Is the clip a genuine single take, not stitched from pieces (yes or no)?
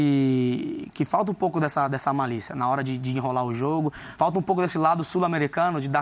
yes